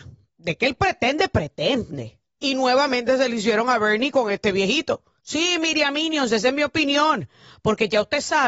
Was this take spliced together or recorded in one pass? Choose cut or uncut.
cut